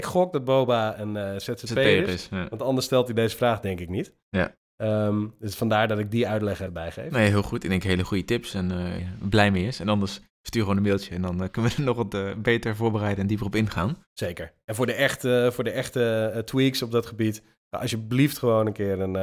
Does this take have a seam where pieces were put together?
yes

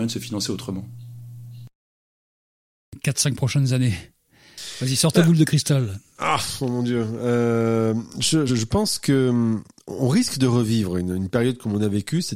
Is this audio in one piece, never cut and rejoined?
no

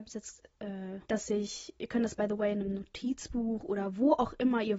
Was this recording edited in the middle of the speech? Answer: yes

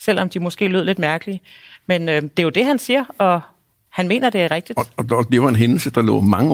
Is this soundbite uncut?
yes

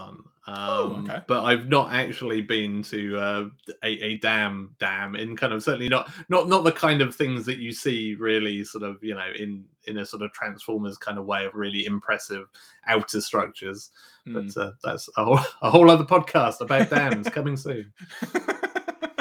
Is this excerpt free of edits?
no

